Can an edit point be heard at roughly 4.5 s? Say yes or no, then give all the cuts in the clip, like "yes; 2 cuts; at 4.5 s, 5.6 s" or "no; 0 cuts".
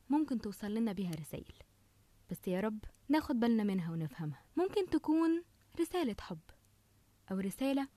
yes; 2 cuts; at 3.0 s, 4.5 s